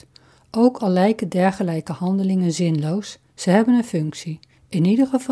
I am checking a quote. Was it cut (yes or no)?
no